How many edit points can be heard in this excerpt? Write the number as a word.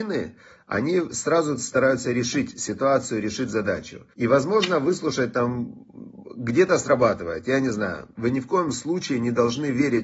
two